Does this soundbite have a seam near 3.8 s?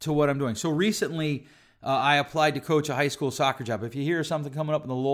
no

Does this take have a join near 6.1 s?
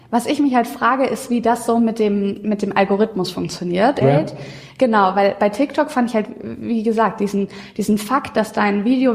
no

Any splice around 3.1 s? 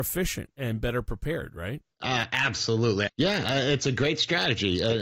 yes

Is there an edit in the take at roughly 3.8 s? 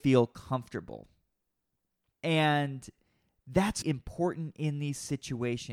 yes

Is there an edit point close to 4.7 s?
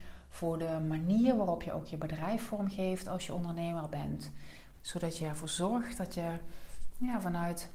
yes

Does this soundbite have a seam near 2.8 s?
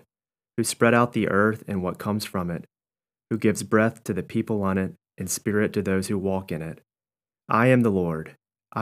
no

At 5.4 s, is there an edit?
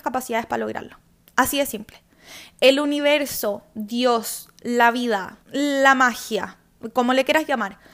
yes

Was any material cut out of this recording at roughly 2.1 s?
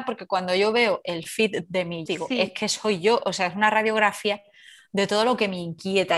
yes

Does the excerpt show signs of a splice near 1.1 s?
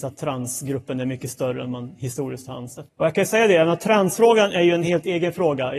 no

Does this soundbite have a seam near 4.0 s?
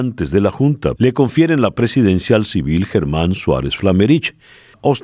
no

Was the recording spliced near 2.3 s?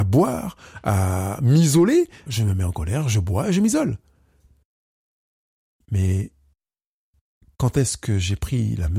yes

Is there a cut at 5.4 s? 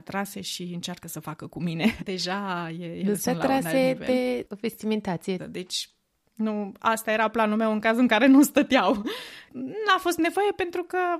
yes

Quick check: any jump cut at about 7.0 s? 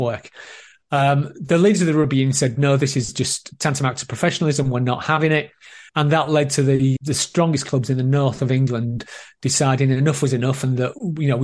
yes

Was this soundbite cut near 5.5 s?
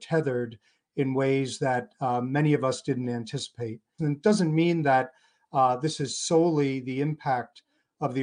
no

